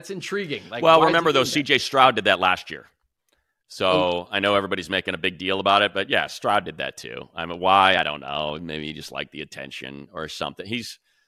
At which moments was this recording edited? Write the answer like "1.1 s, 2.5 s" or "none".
none